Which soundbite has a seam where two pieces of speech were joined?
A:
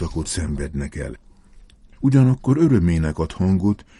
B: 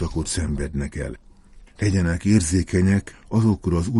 B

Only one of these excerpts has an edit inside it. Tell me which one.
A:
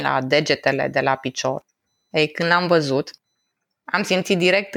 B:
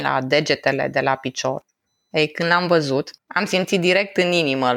B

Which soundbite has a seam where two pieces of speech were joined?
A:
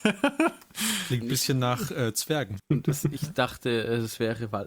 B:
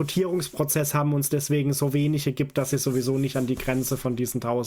A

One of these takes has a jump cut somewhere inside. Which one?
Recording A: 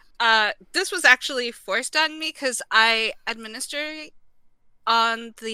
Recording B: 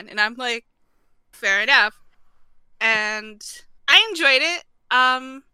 B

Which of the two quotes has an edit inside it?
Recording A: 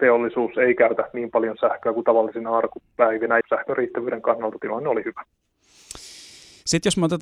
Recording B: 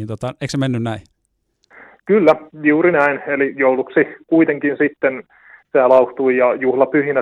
A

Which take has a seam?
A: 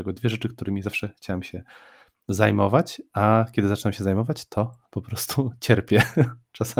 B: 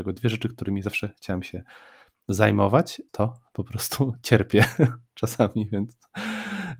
B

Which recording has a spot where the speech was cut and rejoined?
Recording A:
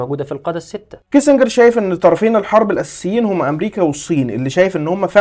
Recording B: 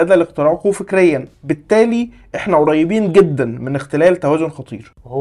A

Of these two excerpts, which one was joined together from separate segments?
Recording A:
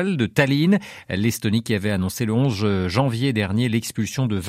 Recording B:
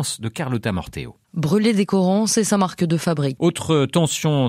B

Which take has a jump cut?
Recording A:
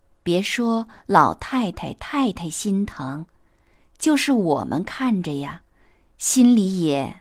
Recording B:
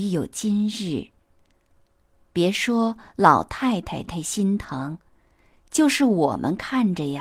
B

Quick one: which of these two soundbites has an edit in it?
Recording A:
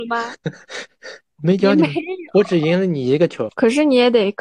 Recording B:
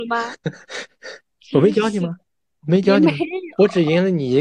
A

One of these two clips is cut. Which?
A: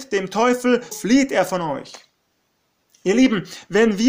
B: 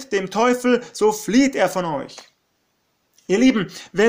A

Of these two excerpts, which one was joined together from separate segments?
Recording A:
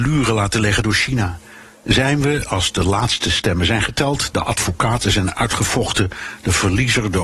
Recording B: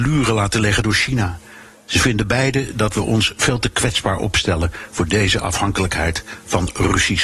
A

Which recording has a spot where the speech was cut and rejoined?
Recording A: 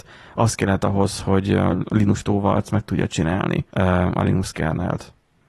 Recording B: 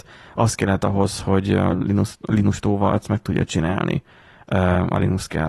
A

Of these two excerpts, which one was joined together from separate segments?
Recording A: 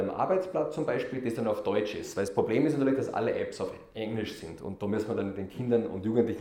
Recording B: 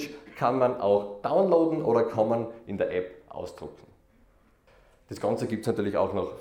B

